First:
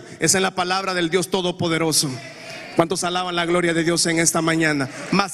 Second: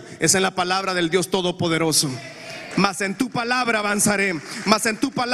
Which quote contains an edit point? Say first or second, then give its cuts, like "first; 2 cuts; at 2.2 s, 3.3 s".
second; 1 cut; at 2.7 s